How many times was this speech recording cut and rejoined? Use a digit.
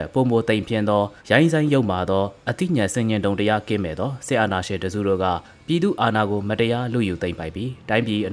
1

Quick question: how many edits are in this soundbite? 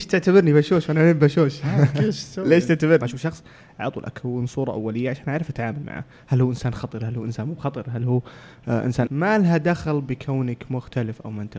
2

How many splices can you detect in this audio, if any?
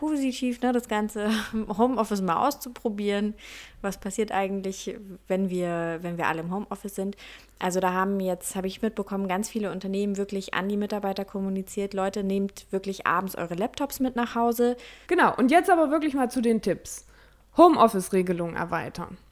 1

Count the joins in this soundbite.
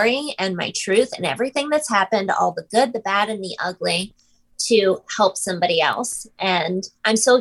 0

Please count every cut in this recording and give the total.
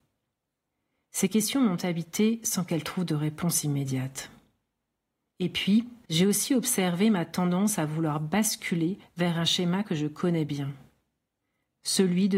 1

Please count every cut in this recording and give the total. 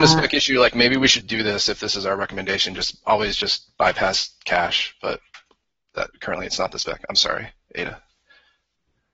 1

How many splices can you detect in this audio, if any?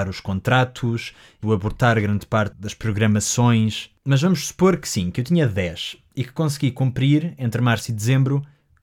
2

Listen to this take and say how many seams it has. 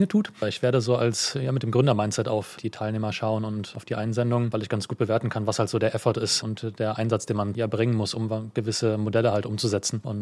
0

